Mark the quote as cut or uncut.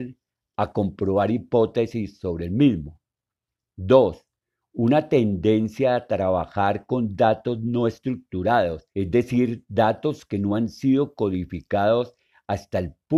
cut